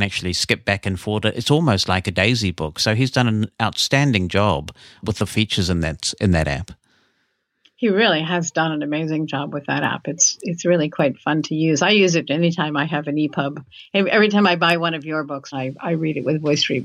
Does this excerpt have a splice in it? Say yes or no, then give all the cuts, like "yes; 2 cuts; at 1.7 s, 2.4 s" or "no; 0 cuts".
yes; 1 cut; at 15.5 s